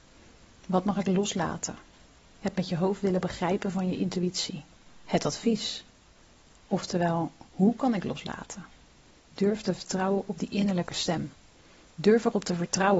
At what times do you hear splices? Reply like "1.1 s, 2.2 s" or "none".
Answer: none